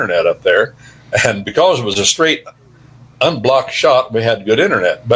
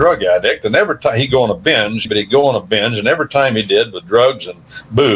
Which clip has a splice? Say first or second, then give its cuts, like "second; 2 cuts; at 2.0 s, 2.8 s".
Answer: second; 1 cut; at 2.1 s